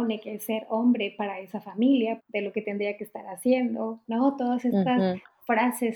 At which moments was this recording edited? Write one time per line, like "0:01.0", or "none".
0:02.2